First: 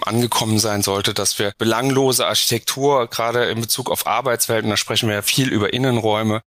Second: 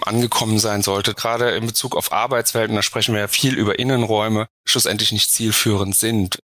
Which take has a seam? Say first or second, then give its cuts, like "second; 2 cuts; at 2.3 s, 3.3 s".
second; 2 cuts; at 1.1 s, 4.5 s